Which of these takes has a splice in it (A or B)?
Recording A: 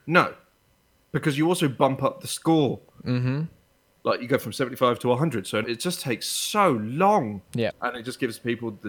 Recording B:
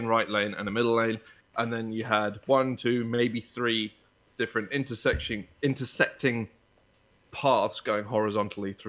A